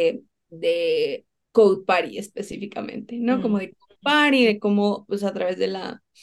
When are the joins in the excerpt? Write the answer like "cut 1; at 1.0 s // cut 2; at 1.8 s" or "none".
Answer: none